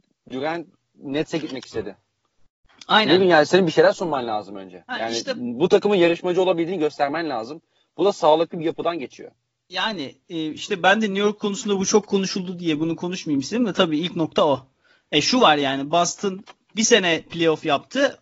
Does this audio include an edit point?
no; 0 cuts

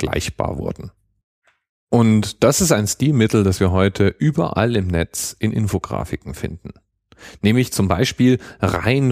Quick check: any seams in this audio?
no; 0 cuts

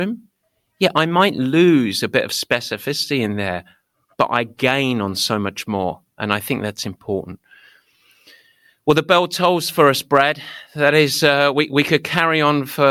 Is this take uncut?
yes; 0 cuts

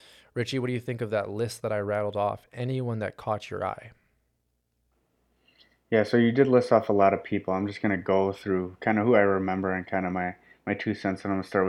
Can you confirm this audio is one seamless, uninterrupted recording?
yes; 0 cuts

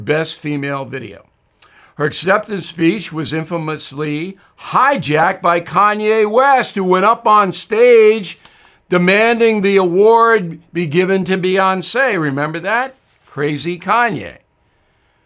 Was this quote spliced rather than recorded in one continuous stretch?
no; 0 cuts

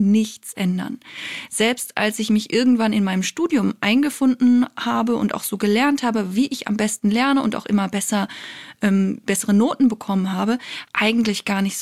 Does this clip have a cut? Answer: yes; 1 cut; at 10.8 s

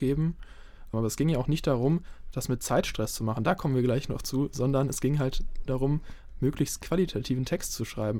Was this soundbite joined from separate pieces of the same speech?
yes; 1 cut; at 0.9 s

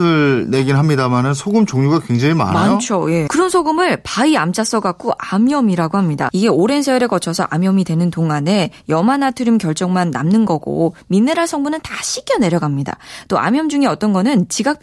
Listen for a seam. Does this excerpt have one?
yes; 2 cuts; at 3.3 s, 6.3 s

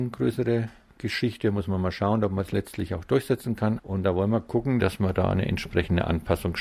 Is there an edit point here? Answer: yes; 2 cuts; at 3.8 s, 4.8 s

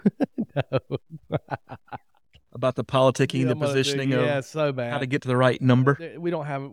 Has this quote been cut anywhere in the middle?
no; 0 cuts

